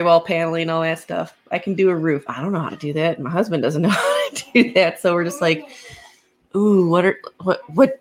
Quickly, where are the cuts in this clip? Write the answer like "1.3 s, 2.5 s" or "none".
2.3 s